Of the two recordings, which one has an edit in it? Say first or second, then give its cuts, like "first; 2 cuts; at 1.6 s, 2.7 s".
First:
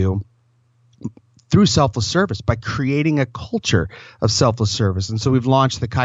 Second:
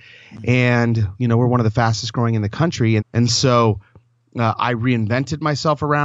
second; 1 cut; at 3.0 s